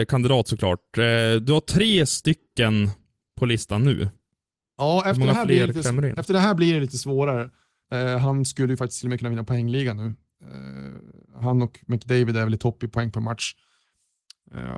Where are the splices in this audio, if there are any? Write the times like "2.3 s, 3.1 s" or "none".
7.8 s